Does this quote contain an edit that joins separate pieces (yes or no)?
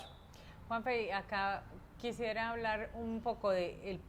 no